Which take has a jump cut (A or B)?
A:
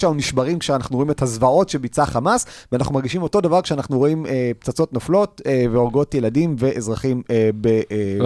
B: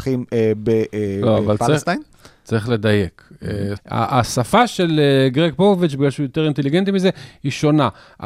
B